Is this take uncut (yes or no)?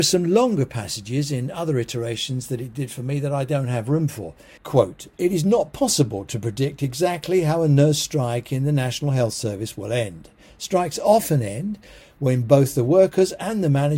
no